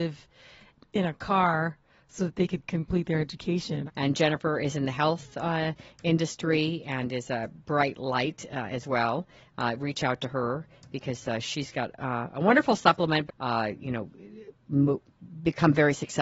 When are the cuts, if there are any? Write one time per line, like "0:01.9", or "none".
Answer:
0:03.9
0:13.3